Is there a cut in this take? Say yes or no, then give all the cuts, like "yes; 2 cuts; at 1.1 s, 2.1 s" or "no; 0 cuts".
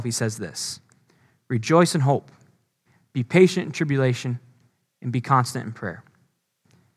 no; 0 cuts